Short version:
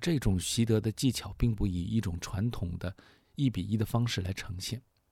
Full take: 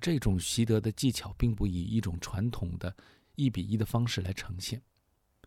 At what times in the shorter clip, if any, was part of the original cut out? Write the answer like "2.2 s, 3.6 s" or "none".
none